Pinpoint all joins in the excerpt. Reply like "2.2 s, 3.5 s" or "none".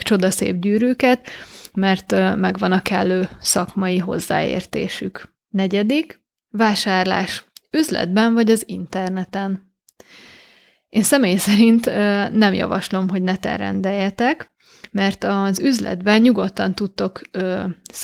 5.4 s